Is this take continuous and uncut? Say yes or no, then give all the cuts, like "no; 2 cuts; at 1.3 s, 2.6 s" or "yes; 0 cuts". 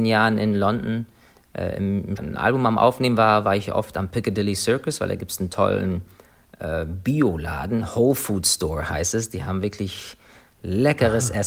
no; 1 cut; at 2.2 s